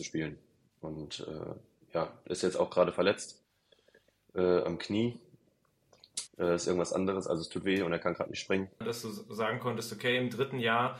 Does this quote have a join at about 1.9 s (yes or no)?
no